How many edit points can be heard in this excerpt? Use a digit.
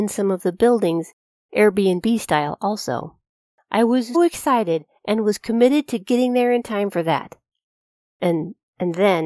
1